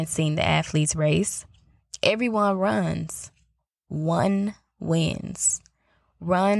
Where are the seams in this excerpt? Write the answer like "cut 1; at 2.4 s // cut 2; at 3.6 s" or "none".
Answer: none